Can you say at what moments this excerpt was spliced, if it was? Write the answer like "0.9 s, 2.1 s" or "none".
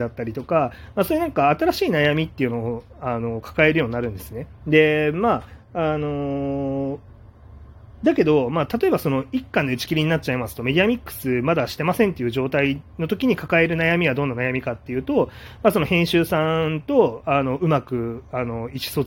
4.6 s